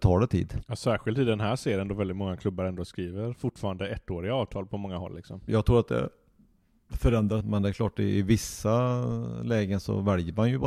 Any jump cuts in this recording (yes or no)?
yes